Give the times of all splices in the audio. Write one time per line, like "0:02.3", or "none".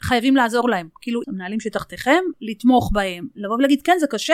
0:01.2
0:02.3

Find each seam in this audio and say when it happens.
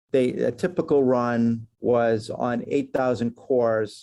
0:01.7

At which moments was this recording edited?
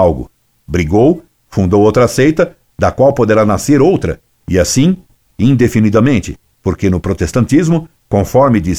none

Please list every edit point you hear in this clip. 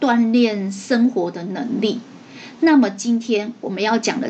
none

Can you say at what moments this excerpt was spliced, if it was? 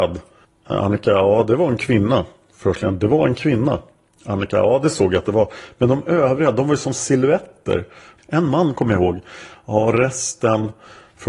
0:08.2

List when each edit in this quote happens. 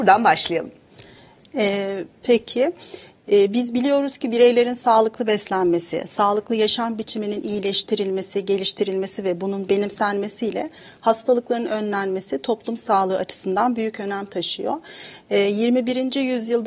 none

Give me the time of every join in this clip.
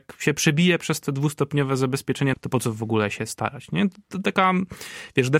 0:02.3

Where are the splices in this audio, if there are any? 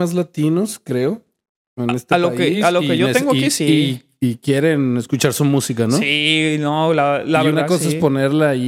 none

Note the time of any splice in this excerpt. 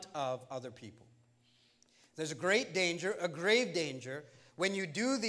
none

